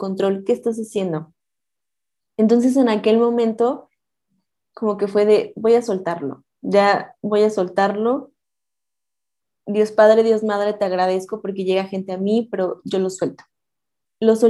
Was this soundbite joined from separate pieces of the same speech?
no; 0 cuts

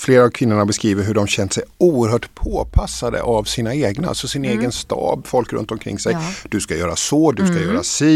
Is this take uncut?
yes; 0 cuts

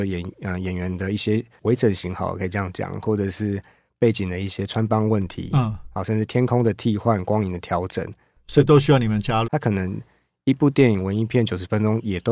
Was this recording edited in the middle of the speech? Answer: yes; 1 cut; at 9.4 s

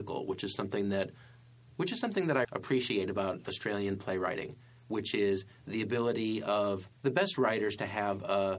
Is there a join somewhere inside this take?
yes; 2 cuts; at 2.4 s, 7.0 s

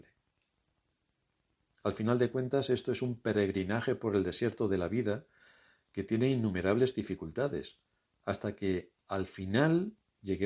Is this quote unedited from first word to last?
yes; 0 cuts

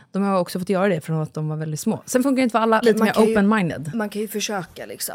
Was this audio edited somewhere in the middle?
yes; 1 cut; at 2.8 s

